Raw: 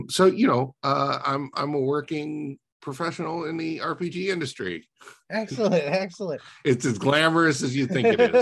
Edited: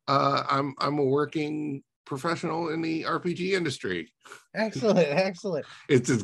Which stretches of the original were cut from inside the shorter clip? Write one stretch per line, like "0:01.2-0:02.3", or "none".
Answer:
none